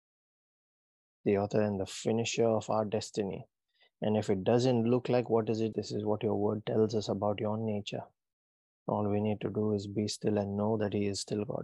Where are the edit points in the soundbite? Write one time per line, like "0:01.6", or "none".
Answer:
0:05.7
0:08.7